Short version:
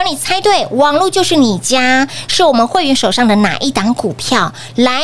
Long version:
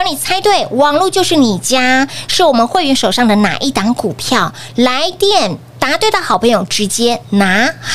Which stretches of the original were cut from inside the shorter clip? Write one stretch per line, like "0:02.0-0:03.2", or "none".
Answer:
none